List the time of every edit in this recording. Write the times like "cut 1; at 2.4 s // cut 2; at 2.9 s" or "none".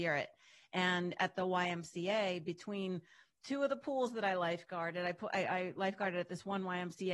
none